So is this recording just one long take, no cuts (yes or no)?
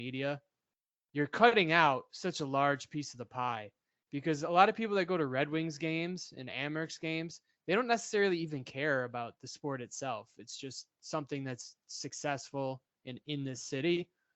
yes